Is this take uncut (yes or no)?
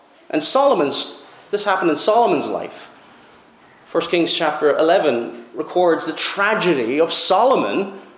yes